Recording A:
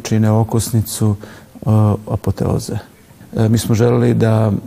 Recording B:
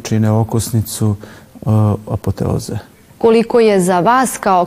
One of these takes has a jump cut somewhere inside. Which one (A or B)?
A